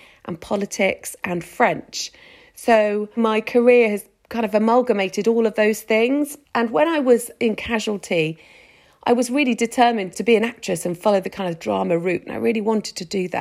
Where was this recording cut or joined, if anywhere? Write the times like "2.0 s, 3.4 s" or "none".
3.2 s, 10.1 s